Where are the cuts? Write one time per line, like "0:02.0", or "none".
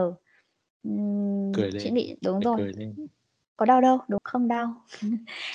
0:02.2
0:04.2